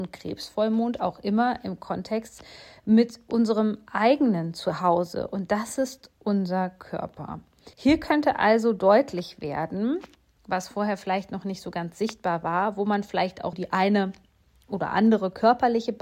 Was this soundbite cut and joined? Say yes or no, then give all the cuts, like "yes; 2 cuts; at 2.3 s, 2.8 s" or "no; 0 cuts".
yes; 2 cuts; at 7.7 s, 13.5 s